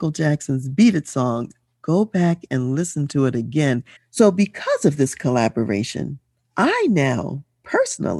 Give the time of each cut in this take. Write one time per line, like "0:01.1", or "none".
0:04.0

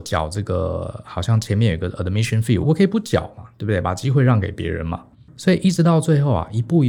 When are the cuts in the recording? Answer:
0:02.6

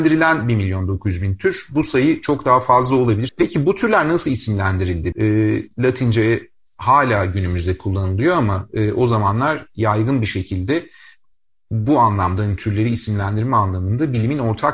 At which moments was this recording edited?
0:03.3
0:05.1

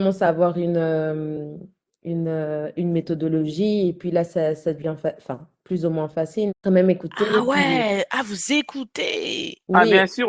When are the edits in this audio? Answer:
0:06.5

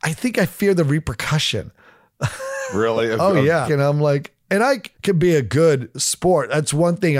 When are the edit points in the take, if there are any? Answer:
0:03.7
0:04.9

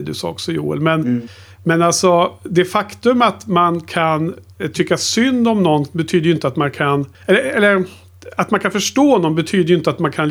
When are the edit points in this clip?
0:07.1

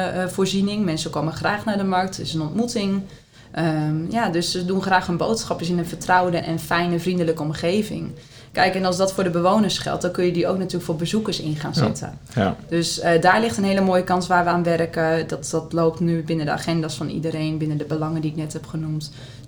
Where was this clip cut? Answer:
0:06.4

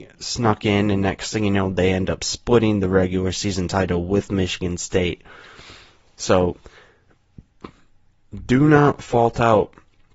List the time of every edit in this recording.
none

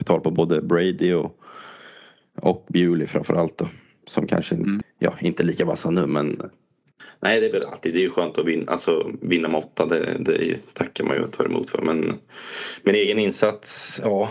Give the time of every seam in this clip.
0:04.8

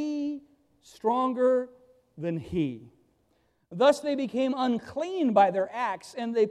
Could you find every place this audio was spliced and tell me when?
0:03.6

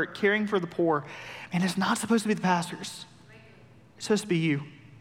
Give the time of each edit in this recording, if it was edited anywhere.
none

